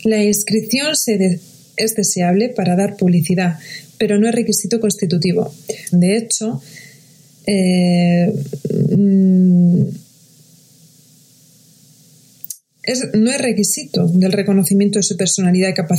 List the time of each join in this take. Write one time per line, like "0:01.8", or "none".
0:05.9